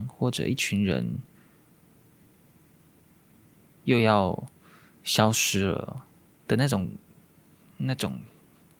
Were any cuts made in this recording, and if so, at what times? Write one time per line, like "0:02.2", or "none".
0:06.4